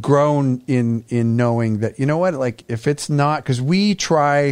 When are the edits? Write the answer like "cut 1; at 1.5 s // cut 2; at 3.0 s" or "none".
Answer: cut 1; at 2.6 s

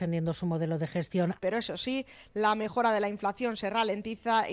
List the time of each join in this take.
cut 1; at 1.4 s

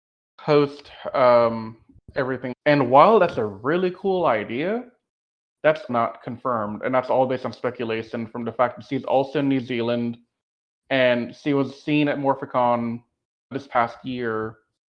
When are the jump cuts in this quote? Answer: cut 1; at 2.5 s // cut 2; at 5.9 s // cut 3; at 13.5 s

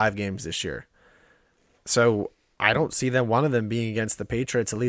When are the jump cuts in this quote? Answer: none

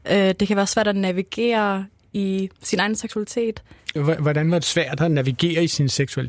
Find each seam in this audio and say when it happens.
cut 1; at 4.0 s

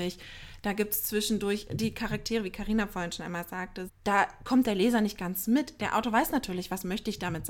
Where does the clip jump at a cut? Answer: cut 1; at 3.9 s

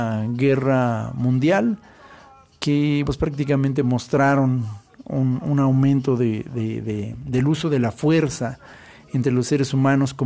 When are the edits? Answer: cut 1; at 3.1 s

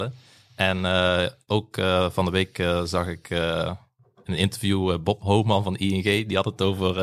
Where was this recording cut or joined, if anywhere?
none

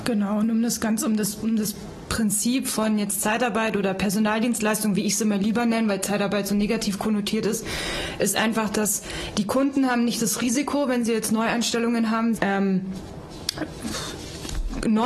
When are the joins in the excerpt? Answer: cut 1; at 12.4 s

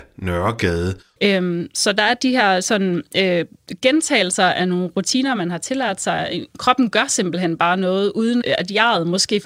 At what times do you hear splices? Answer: cut 1; at 1.2 s // cut 2; at 8.4 s

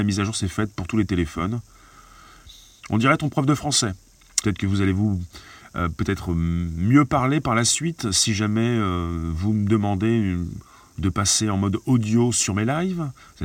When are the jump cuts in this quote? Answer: cut 1; at 4.4 s

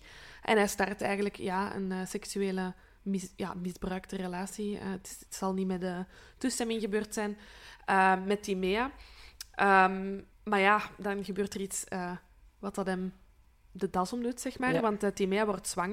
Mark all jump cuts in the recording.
cut 1; at 10.3 s

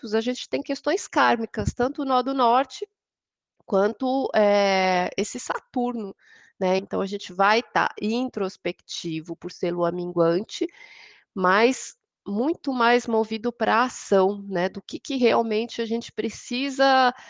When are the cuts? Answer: cut 1; at 6.8 s

